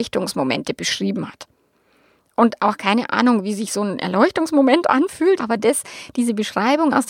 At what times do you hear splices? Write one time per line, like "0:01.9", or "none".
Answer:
0:05.4